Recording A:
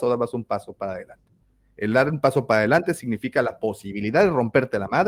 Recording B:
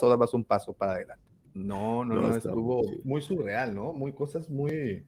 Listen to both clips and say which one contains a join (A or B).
B